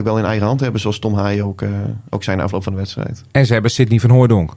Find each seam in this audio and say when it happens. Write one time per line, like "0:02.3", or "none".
none